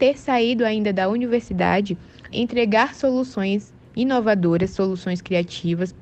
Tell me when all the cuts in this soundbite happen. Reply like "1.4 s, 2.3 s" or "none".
2.3 s